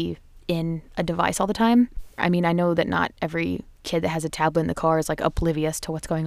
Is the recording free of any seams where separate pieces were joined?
no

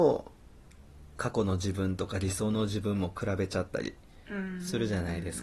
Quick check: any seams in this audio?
no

